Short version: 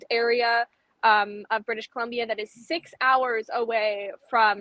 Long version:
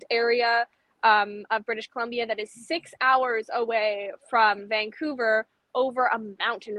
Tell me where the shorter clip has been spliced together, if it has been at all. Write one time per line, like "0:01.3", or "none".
none